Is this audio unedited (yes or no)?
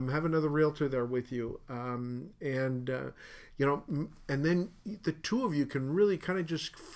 yes